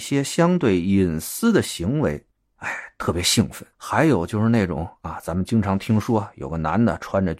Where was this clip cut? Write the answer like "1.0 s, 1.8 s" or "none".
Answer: 3.7 s